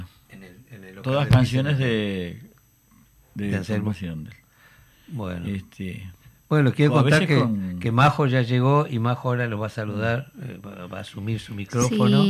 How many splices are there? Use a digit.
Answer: 0